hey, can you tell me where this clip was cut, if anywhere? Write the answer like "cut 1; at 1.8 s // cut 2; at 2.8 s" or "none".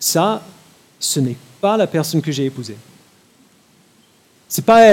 none

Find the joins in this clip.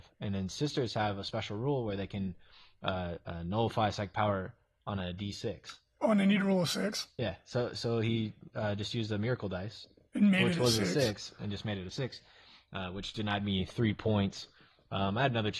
none

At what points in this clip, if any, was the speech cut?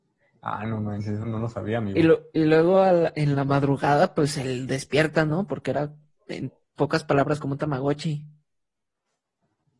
cut 1; at 1.2 s

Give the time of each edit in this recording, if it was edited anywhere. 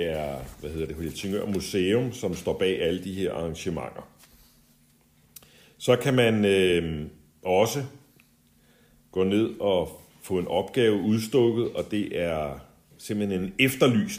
none

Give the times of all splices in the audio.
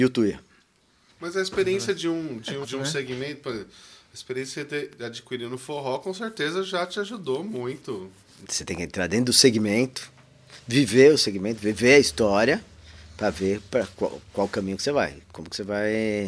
cut 1; at 1.1 s // cut 2; at 2.6 s // cut 3; at 8.4 s

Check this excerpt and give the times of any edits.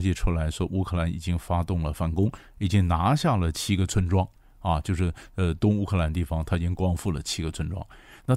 none

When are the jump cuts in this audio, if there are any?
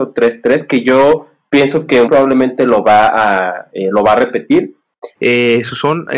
cut 1; at 2.0 s // cut 2; at 5.1 s

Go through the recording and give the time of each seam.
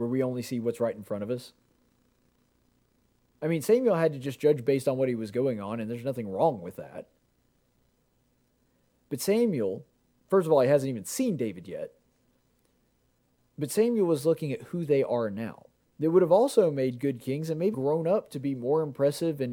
cut 1; at 15.8 s // cut 2; at 17.7 s

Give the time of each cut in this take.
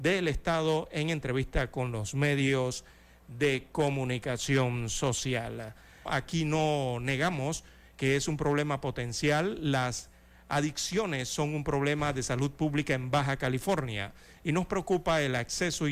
cut 1; at 6.1 s

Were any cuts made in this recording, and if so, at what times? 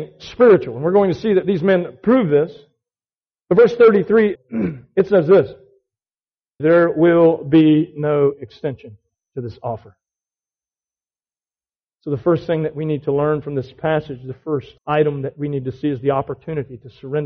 cut 1; at 4.3 s // cut 2; at 6.6 s // cut 3; at 14.8 s

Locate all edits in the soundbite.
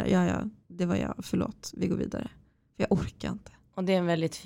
none

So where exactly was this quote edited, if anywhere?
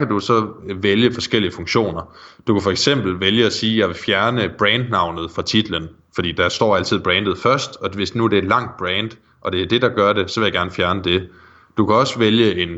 none

